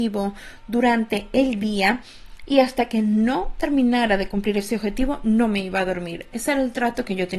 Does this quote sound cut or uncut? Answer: uncut